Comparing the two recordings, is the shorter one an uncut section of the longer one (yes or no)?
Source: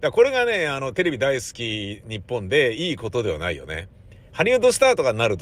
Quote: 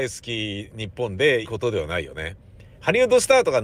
no